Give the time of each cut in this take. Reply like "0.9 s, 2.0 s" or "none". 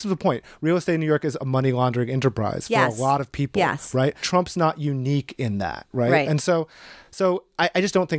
none